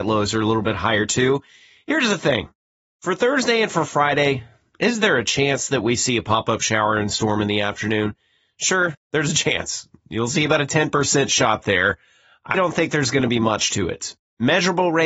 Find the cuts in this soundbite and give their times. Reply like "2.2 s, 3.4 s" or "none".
12.5 s